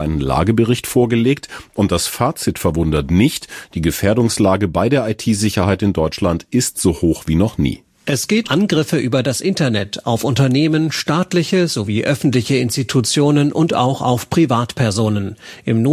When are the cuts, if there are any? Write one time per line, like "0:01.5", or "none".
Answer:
0:08.4